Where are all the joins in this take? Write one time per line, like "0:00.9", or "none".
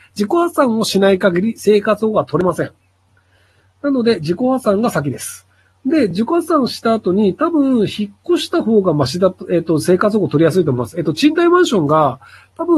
none